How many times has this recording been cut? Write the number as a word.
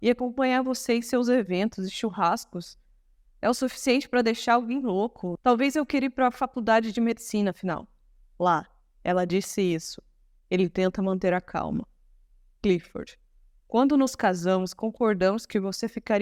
one